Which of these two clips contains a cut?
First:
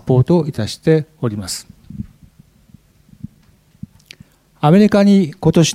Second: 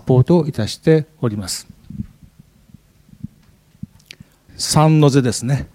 second; 1 cut; at 4.5 s

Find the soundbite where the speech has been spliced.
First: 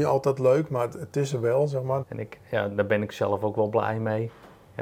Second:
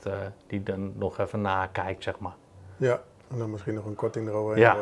first; 1 cut; at 2.0 s

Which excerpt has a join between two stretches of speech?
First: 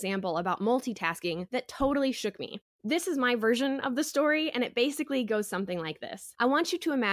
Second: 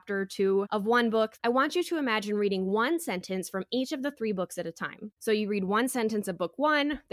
second; 1 cut; at 1.4 s

